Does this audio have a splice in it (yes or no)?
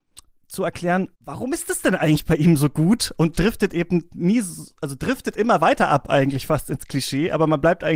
yes